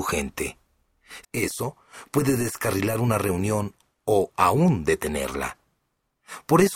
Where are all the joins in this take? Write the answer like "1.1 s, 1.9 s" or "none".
1.2 s